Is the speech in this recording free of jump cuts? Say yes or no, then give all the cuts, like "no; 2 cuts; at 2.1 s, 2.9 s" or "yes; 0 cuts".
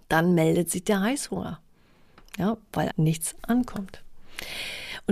no; 1 cut; at 2.9 s